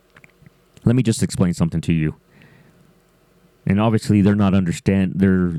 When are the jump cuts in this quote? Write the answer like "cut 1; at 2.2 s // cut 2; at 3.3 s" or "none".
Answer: none